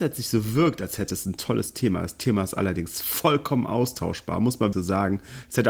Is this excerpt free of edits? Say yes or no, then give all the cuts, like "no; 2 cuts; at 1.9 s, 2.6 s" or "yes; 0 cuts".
no; 1 cut; at 4.7 s